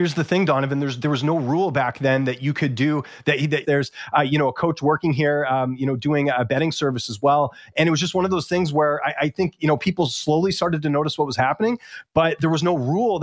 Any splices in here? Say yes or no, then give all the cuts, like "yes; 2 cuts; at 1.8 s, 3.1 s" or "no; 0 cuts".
yes; 1 cut; at 3.6 s